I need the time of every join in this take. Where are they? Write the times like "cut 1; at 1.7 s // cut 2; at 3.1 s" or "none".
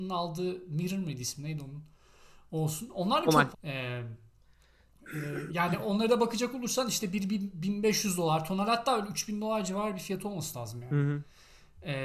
cut 1; at 3.5 s